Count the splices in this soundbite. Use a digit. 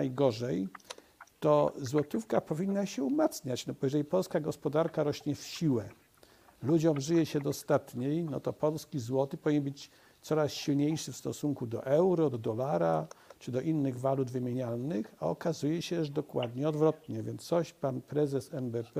0